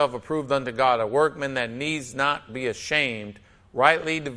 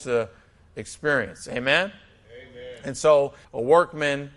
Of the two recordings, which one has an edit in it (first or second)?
second